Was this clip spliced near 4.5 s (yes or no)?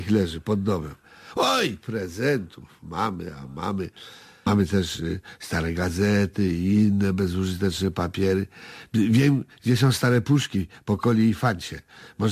yes